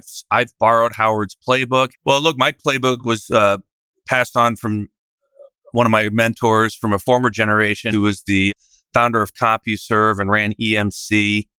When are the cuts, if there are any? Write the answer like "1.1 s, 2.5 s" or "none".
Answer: 1.9 s, 7.9 s